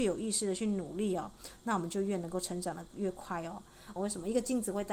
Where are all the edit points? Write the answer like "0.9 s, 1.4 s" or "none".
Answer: 4.0 s